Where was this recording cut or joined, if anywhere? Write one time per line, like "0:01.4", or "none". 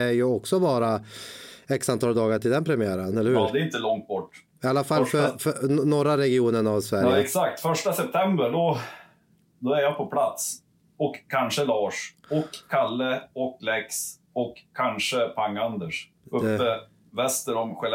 0:14.2
0:16.1

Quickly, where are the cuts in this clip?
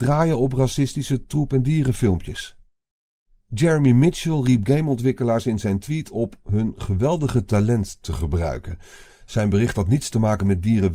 0:09.1

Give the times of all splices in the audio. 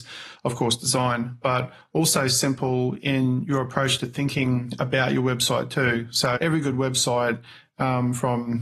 0:06.4

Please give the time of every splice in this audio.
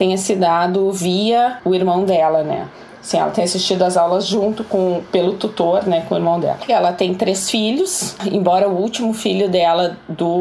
0:06.7

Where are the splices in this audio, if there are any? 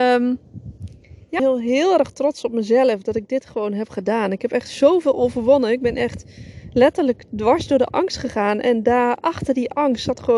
0:01.4

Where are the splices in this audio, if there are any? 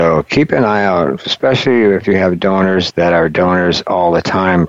0:02.9

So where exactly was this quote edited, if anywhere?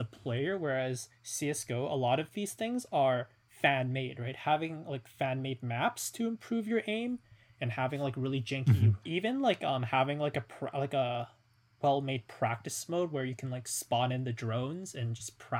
0:09.0

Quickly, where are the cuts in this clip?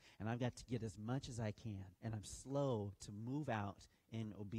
0:02.0

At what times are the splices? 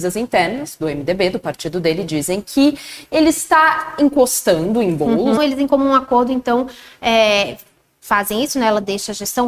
0:05.4

